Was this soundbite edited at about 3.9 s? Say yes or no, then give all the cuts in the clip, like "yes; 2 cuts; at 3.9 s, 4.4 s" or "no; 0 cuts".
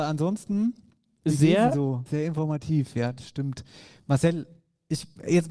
no; 1 cut; at 2.1 s